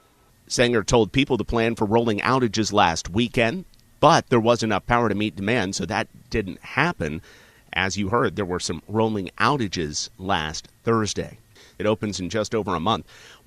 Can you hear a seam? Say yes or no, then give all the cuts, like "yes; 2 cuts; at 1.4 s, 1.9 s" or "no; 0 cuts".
yes; 1 cut; at 11.7 s